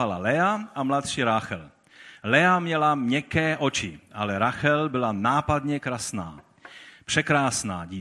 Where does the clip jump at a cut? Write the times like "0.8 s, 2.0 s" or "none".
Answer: none